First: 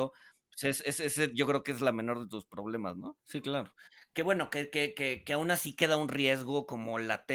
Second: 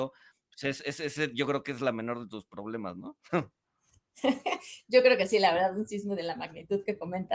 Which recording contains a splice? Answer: first; 1 cut; at 3.2 s

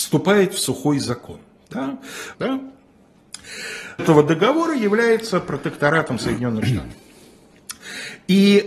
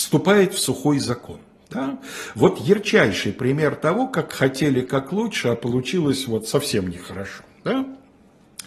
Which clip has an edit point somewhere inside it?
first; 2 cuts; at 2.3 s, 4.0 s

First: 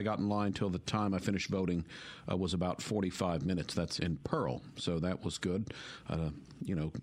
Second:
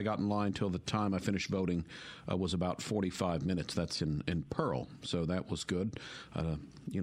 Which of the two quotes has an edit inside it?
first; 1 cut; at 4.0 s

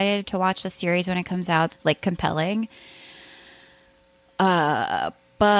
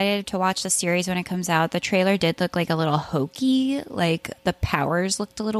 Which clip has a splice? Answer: first; 1 cut; at 1.7 s

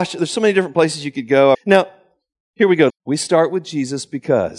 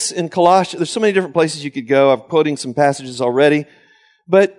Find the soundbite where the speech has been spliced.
first; 2 cuts; at 1.5 s, 2.9 s

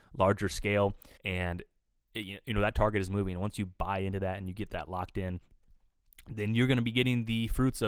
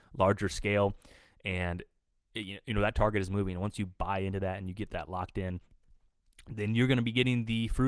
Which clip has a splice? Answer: first; 1 cut; at 1.2 s

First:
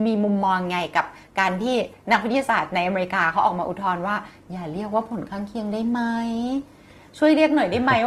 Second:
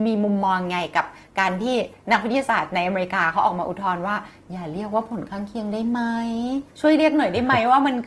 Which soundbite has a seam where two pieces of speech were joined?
second; 1 cut; at 6.7 s

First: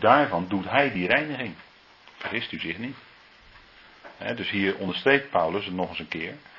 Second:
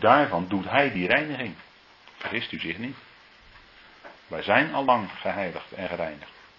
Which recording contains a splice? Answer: second; 1 cut; at 4.2 s

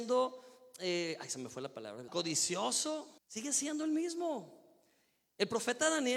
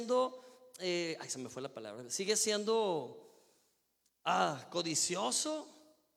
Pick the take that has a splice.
first; 2 cuts; at 2.1 s, 3.2 s

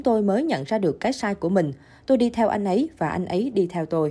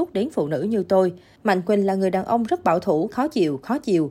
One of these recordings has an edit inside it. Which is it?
second; 2 cuts; at 1.4 s, 3.1 s

